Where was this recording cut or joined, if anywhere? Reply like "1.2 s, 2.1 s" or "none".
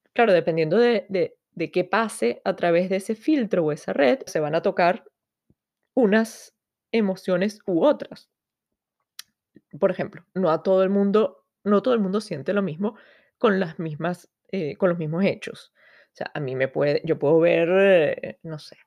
4.3 s